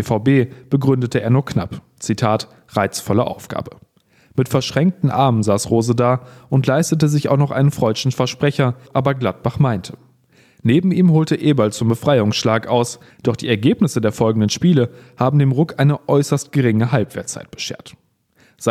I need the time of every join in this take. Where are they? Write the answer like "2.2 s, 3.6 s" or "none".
8.9 s, 13.1 s